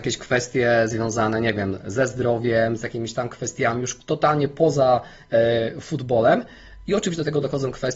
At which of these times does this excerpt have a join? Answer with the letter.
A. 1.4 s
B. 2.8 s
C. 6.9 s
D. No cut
D